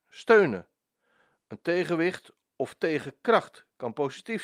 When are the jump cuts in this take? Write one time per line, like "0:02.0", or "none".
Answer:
none